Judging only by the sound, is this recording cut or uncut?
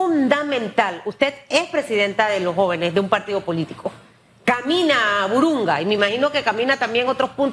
uncut